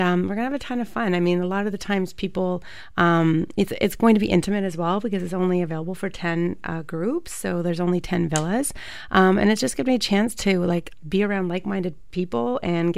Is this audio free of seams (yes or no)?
yes